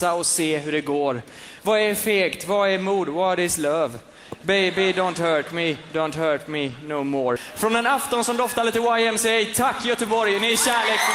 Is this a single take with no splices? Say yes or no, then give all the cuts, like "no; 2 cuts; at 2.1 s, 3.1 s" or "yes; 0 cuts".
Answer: yes; 0 cuts